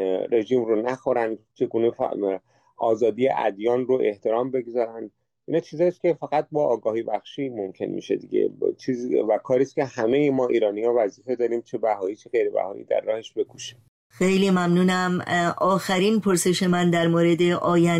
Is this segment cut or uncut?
uncut